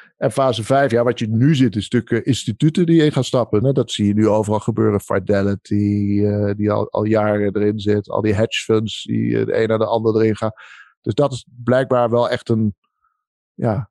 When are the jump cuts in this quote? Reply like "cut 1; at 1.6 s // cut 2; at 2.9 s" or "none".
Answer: cut 1; at 3.6 s